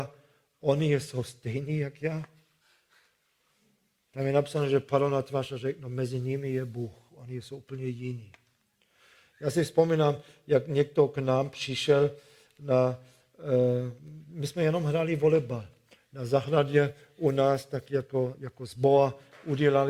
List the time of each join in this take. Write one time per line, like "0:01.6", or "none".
none